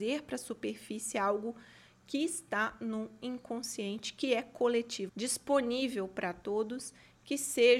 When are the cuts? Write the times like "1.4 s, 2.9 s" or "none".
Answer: 5.1 s